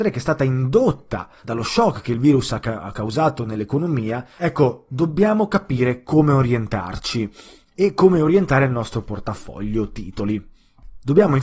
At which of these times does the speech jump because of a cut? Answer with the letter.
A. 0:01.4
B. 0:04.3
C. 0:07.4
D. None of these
A